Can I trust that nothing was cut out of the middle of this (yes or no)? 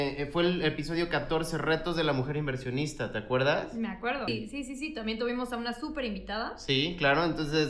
no